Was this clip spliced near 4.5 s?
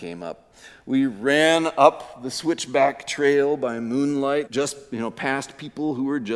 yes; 1 cut; at 4.5 s

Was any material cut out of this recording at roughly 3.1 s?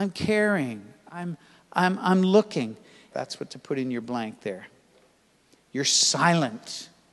yes; 1 cut; at 3.1 s

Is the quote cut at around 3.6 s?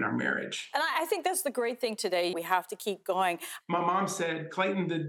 yes; 2 cuts; at 2.3 s, 3.6 s

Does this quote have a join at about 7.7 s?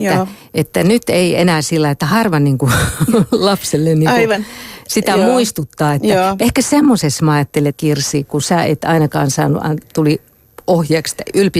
yes; 2 cuts; at 6.4 s, 7.7 s

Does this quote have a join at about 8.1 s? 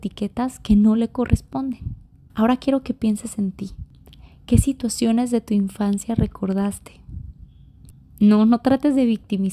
no; 1 cut; at 2.3 s

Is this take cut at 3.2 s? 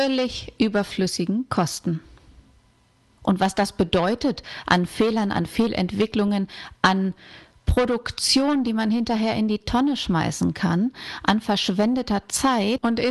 yes; 1 cut; at 3.2 s

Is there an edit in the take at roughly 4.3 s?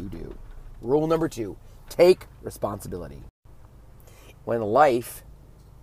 yes; 1 cut; at 4.3 s

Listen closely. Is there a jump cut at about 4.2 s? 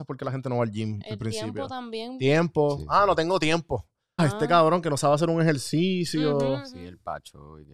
yes; 1 cut; at 4.2 s

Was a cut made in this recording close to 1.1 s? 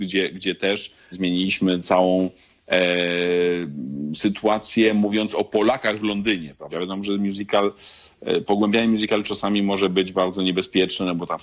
yes; 2 cuts; at 1.1 s, 6.7 s

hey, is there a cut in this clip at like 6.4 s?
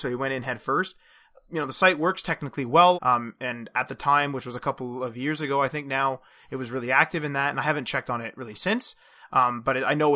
no; 1 cut; at 2.9 s

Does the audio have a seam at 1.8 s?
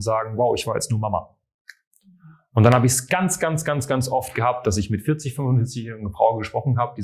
no; 0 cuts

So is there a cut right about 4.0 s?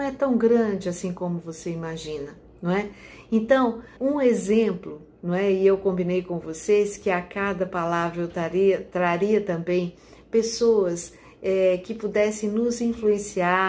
yes; 1 cut; at 4.0 s

